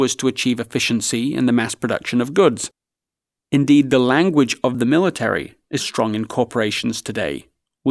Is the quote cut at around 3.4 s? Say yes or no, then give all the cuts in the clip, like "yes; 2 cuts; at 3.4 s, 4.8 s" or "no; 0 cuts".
yes; 2 cuts; at 3.4 s, 5.8 s